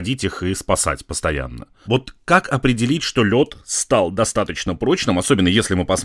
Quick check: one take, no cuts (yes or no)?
yes